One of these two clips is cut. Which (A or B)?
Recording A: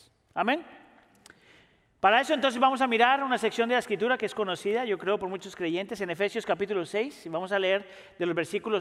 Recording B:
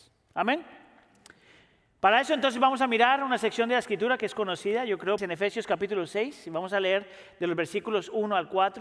B